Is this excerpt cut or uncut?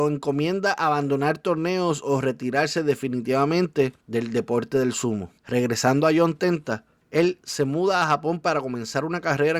cut